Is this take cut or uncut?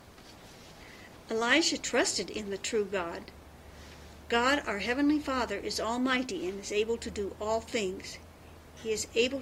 uncut